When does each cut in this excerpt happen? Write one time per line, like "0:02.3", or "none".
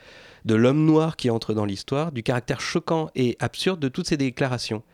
none